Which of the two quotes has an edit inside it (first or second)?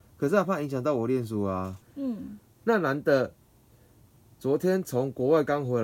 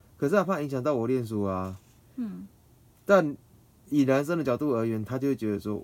first